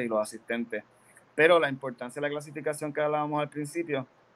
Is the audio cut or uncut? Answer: uncut